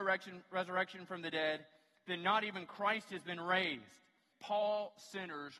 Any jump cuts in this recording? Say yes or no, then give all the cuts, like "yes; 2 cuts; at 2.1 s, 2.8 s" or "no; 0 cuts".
yes; 1 cut; at 4.3 s